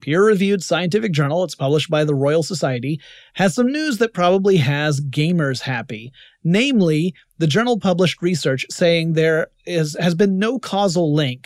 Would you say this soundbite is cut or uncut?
uncut